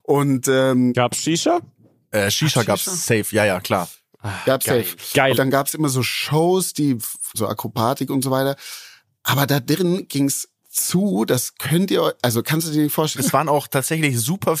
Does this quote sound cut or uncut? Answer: cut